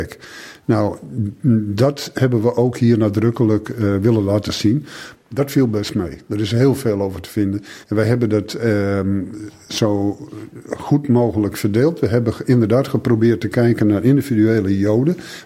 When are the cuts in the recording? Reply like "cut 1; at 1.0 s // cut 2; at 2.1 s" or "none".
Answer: cut 1; at 5.1 s // cut 2; at 7.8 s